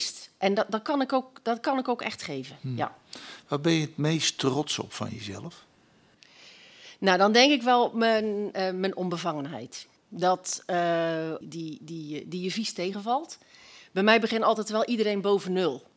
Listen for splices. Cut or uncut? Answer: cut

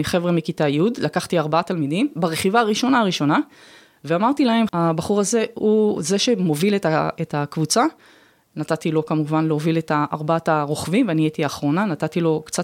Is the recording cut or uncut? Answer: cut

